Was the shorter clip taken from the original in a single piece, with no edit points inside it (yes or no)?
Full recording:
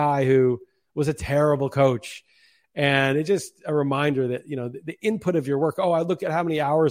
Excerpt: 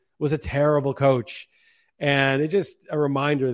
yes